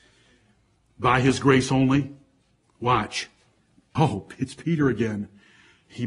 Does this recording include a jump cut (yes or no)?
yes